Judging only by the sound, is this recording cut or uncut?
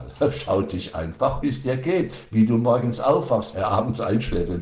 cut